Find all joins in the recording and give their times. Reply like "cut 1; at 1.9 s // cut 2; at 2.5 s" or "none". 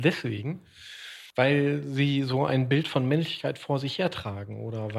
cut 1; at 1.3 s